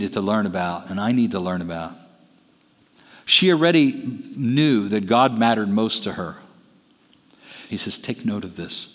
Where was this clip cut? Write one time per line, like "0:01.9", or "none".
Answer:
0:07.7